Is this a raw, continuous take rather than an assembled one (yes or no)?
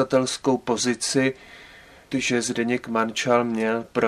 no